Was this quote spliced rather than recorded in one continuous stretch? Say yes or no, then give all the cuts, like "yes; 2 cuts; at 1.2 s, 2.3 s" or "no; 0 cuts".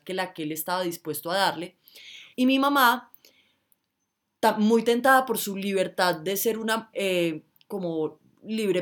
yes; 2 cuts; at 2.3 s, 6.9 s